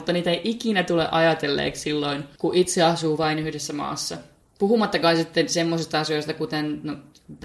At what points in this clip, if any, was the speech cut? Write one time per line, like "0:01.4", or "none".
none

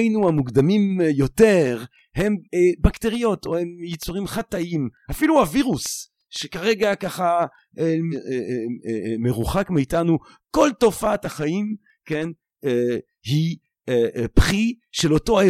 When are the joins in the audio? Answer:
0:02.4
0:08.1

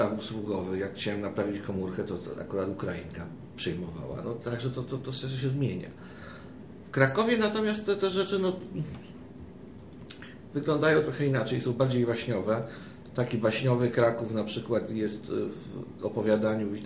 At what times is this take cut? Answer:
none

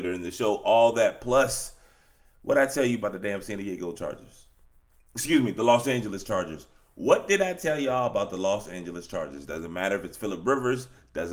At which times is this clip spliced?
none

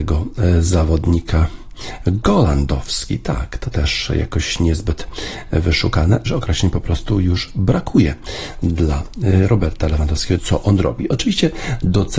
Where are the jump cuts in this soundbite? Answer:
0:06.3
0:10.4

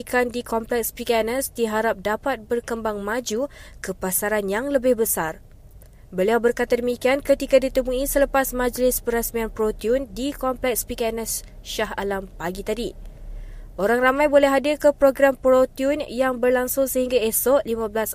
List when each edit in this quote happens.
none

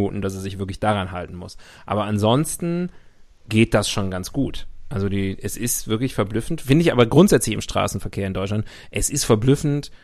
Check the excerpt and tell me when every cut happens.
none

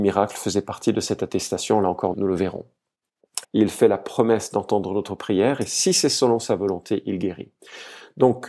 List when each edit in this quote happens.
0:02.1
0:03.4

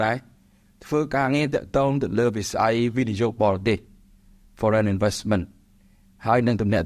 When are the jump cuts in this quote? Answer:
none

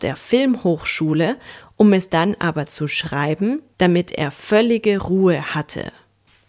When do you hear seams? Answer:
0:03.7

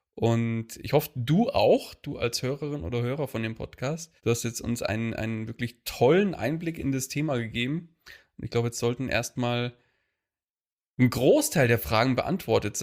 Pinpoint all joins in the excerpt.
0:04.2

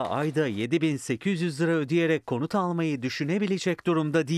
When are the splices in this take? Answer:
none

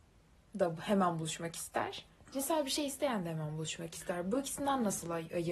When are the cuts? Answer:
none

